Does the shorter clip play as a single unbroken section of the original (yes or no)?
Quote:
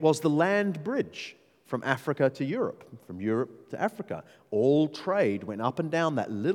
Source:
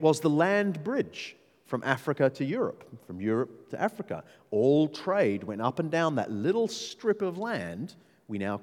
yes